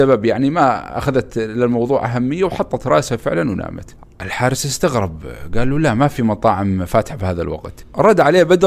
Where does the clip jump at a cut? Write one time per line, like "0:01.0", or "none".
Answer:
0:04.0